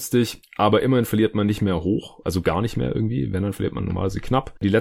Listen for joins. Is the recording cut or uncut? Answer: uncut